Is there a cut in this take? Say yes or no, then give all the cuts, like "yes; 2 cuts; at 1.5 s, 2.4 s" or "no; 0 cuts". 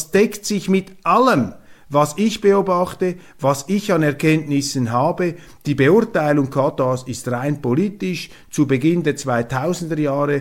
no; 0 cuts